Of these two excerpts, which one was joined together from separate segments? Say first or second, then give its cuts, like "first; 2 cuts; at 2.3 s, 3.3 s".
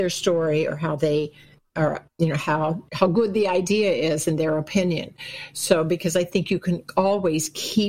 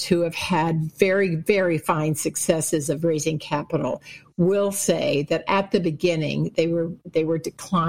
first; 1 cut; at 1.7 s